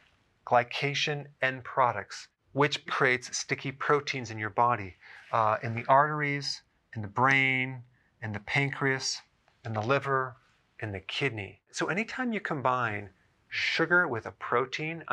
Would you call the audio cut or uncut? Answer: cut